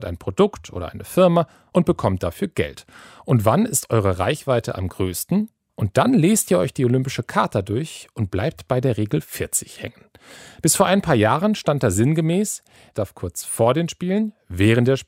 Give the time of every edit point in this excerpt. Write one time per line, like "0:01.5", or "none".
0:05.7
0:12.9